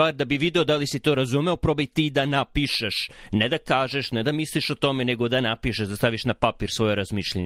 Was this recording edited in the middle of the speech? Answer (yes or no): no